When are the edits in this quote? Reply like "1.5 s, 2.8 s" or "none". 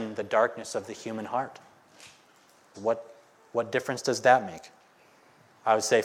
2.7 s